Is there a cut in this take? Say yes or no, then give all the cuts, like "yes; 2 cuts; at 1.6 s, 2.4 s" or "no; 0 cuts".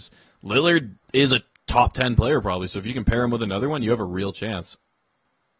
no; 0 cuts